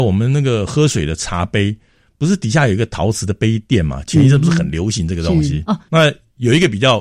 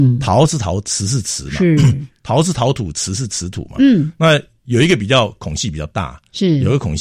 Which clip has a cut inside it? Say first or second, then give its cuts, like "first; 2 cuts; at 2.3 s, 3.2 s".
first; 1 cut; at 5.9 s